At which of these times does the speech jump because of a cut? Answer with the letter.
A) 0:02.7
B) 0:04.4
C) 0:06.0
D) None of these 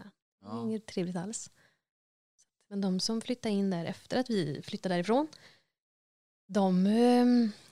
A